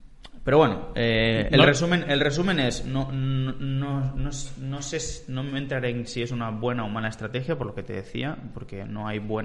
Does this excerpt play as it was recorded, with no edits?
yes; 0 cuts

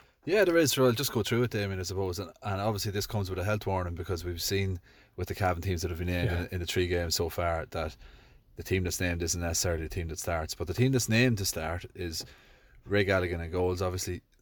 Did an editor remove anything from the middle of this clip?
no; 0 cuts

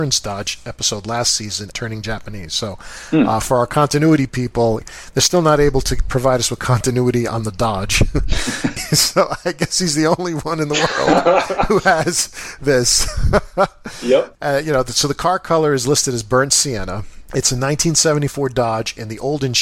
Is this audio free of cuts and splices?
no; 2 cuts; at 1.7 s, 8.8 s

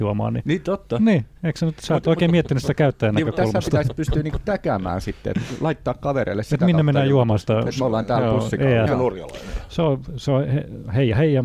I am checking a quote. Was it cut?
yes; 1 cut; at 8.9 s

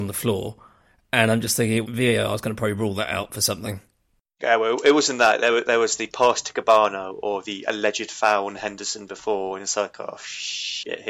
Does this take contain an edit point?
yes; 1 cut; at 1.8 s

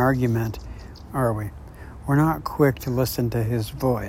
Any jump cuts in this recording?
yes; 1 cut; at 1.1 s

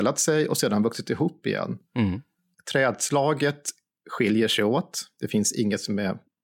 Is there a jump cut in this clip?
yes; 1 cut; at 2.5 s

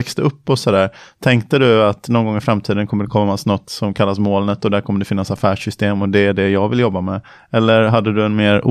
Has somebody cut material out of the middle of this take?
no; 0 cuts

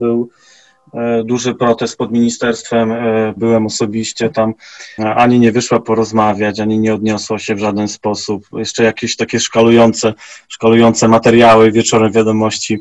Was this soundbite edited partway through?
yes; 2 cuts; at 3.4 s, 5.0 s

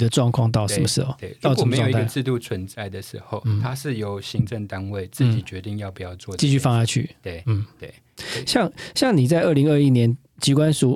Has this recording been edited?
no; 0 cuts

